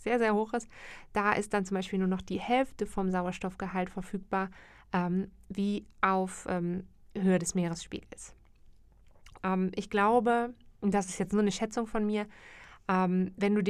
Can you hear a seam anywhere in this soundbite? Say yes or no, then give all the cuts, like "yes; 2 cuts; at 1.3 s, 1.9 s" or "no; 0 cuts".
yes; 2 cuts; at 9.4 s, 10.7 s